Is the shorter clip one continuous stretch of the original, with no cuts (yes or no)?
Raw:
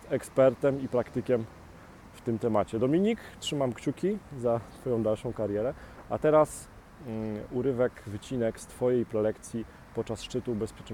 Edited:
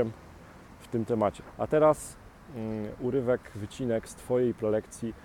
no